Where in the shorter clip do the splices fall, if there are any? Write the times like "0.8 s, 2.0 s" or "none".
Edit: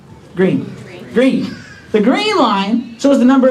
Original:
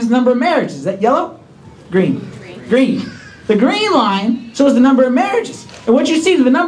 none